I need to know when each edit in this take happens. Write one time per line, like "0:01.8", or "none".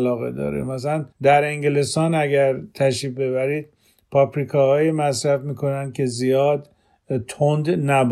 0:01.1